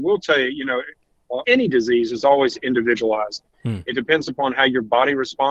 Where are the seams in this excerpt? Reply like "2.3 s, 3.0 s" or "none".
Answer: 1.4 s